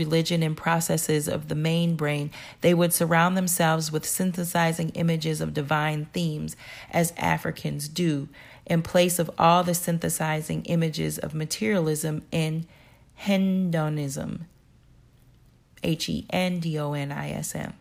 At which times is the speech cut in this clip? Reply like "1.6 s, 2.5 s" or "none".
none